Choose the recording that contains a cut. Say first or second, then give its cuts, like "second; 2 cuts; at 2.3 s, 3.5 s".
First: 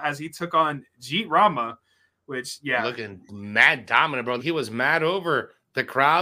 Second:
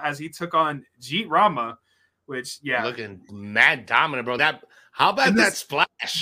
first; 1 cut; at 4.4 s